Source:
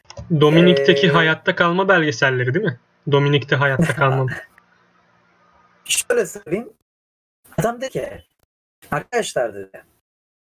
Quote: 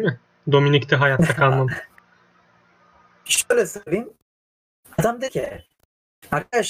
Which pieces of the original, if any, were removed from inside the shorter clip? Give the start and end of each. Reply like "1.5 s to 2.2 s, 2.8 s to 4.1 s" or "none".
none